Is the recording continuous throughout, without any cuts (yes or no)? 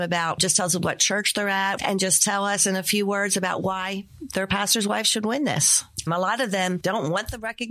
no